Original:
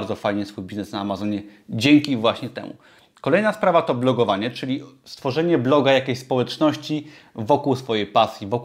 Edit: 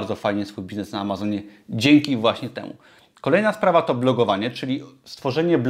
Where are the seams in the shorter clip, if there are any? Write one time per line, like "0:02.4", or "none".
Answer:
none